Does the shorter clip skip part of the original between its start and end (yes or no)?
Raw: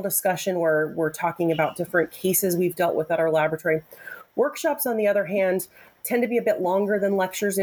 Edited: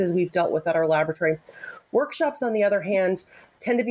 no